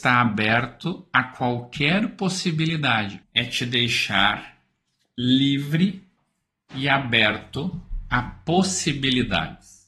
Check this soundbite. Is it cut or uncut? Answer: cut